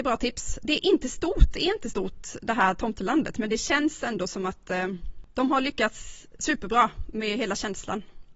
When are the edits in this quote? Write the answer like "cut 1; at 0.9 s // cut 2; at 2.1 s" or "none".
none